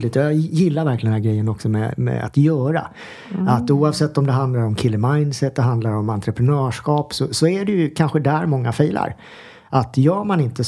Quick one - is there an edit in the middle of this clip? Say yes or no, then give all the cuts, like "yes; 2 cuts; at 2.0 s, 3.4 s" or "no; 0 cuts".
no; 0 cuts